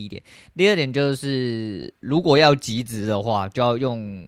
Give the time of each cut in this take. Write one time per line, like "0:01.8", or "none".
none